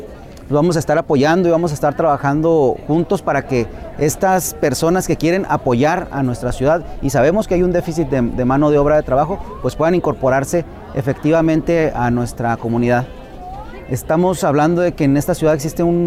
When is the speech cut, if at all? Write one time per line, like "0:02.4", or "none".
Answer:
none